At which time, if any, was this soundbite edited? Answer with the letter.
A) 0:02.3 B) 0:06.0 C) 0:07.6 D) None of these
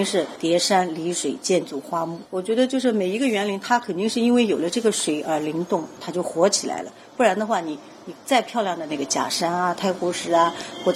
B